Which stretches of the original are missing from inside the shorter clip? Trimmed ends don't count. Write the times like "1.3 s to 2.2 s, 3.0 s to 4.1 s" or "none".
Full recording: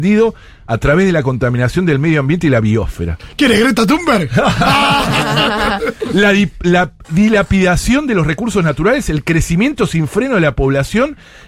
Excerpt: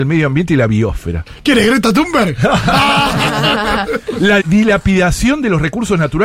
6.3 s to 7.1 s